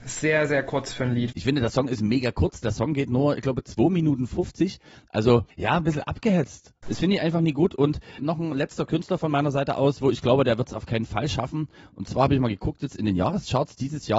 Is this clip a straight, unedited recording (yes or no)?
no